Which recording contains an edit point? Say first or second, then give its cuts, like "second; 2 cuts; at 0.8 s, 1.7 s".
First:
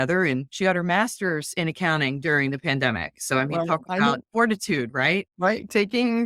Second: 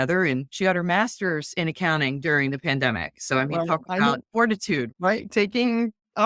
second; 1 cut; at 4.9 s